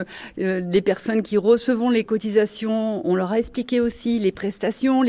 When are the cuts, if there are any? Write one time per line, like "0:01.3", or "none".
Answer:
none